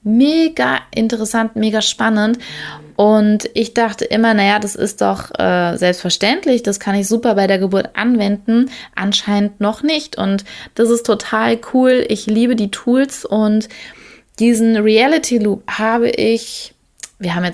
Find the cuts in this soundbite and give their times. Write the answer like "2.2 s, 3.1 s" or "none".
none